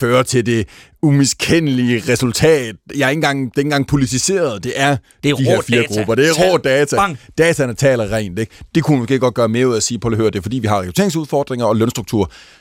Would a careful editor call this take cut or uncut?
uncut